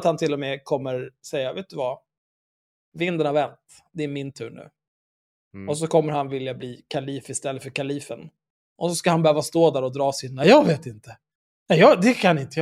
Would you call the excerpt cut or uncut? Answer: cut